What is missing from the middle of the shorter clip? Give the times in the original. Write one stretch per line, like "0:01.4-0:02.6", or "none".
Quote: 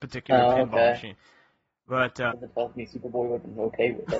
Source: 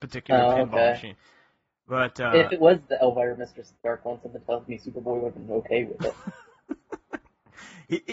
0:02.3-0:04.2